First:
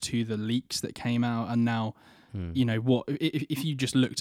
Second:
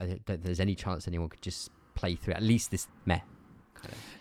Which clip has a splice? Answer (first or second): second